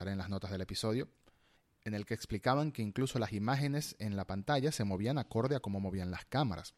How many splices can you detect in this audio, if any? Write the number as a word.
zero